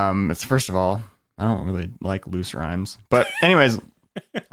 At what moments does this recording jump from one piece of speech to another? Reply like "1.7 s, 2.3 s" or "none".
none